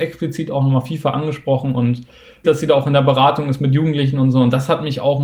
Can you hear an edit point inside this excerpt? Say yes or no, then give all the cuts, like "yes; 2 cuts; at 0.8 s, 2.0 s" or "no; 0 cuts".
yes; 1 cut; at 2.4 s